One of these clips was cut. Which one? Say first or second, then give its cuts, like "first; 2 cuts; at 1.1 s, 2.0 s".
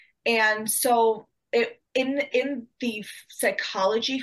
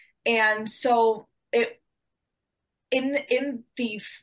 first; 1 cut; at 1.9 s